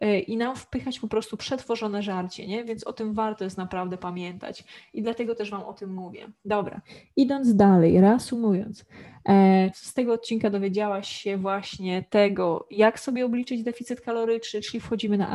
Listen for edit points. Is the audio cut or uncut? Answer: cut